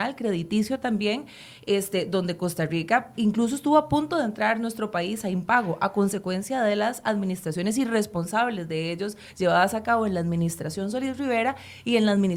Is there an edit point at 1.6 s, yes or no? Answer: no